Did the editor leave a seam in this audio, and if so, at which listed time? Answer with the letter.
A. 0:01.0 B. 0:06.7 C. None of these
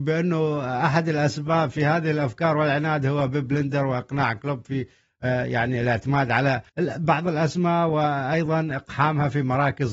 B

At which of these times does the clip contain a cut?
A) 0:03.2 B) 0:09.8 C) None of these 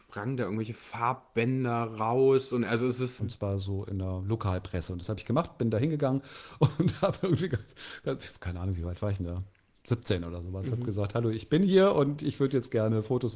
A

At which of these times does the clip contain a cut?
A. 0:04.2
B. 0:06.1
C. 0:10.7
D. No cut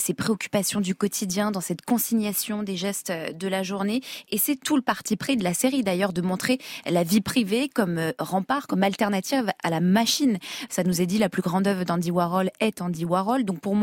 C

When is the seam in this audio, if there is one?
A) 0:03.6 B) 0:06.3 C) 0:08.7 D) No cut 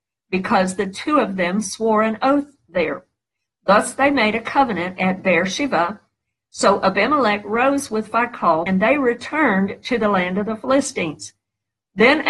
C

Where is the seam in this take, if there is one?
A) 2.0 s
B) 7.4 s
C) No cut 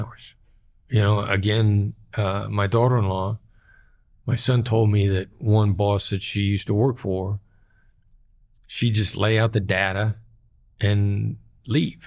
C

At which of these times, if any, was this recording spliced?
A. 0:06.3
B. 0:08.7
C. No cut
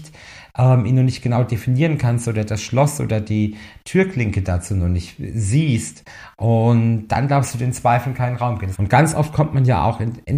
B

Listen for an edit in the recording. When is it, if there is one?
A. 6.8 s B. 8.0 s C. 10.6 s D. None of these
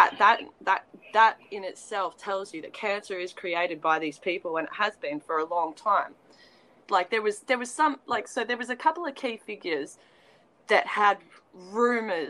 A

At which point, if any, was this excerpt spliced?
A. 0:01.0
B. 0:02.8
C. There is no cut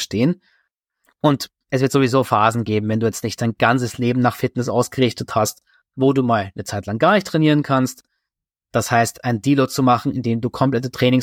A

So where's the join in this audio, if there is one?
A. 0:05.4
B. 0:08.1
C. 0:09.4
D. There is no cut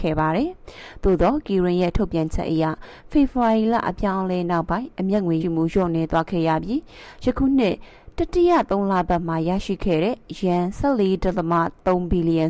A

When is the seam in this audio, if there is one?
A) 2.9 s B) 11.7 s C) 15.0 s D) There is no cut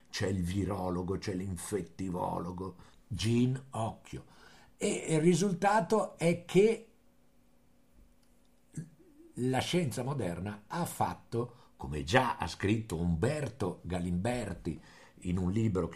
A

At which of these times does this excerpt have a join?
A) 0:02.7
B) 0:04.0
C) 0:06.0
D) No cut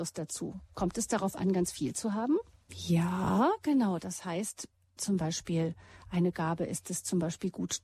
A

